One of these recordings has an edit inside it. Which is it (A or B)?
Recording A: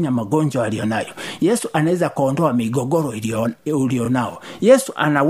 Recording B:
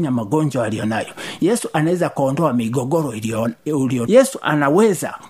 B